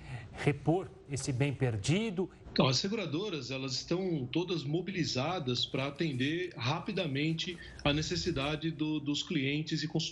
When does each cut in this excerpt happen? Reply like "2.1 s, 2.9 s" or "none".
2.4 s